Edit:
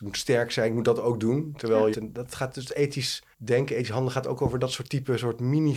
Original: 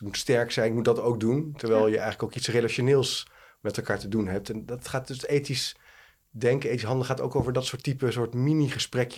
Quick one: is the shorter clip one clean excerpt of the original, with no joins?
no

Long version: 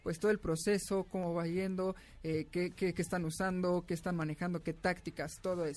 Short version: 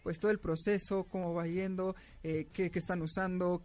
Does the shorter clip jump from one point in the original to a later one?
yes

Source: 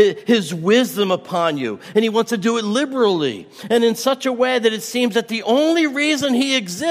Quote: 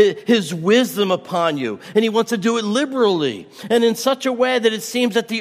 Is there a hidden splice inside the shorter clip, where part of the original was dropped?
no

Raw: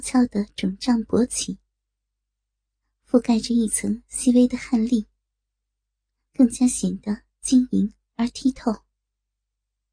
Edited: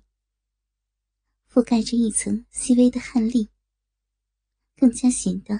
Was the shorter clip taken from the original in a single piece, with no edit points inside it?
yes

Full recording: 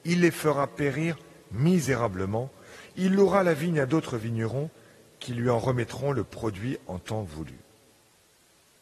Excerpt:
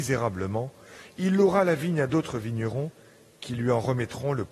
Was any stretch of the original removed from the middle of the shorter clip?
no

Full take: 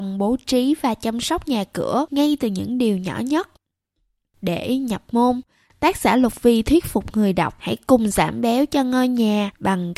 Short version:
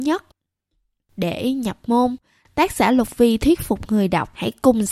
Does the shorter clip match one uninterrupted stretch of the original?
yes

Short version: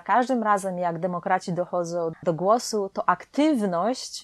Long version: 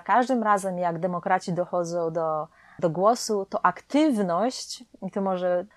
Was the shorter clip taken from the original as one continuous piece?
no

